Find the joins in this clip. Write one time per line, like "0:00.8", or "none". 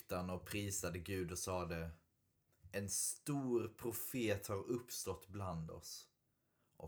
none